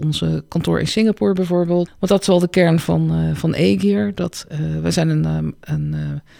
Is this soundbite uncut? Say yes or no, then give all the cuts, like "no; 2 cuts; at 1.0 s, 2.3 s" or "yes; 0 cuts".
no; 1 cut; at 1.9 s